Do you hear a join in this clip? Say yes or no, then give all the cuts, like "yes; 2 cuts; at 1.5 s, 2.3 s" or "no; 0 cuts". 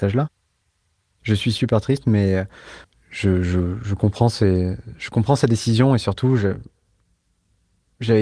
no; 0 cuts